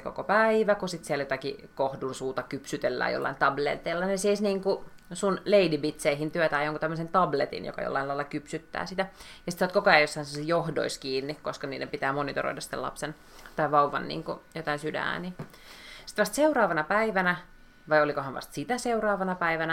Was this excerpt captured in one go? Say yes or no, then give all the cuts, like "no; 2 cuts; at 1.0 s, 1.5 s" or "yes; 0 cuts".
yes; 0 cuts